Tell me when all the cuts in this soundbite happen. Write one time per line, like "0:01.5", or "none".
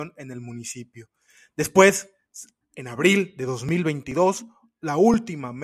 none